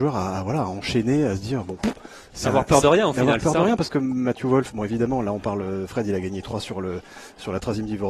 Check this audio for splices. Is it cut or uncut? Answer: uncut